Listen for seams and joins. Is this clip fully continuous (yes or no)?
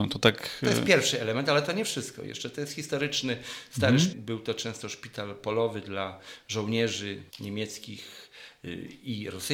no